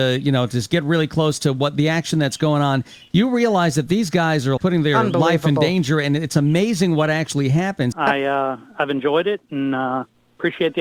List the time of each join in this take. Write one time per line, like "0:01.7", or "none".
0:04.6
0:07.9